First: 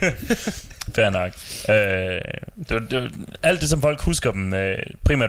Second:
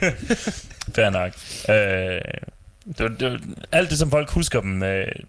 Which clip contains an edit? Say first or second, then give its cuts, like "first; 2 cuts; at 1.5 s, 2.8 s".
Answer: first; 1 cut; at 2.5 s